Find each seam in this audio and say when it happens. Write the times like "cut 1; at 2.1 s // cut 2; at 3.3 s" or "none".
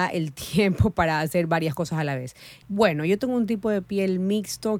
cut 1; at 2.6 s